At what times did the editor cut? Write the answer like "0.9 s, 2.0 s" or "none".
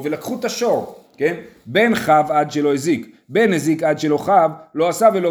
none